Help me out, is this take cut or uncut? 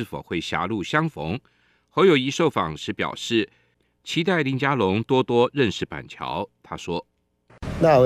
uncut